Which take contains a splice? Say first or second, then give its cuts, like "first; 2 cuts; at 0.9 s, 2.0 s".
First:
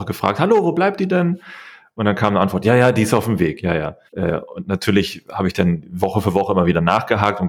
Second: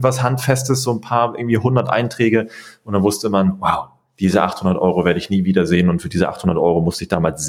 first; 1 cut; at 4.1 s